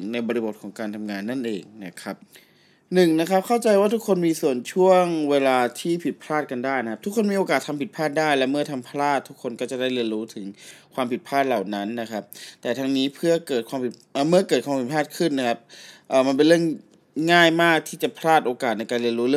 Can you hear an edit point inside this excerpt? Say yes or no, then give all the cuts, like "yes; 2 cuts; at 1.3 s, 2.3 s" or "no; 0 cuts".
no; 0 cuts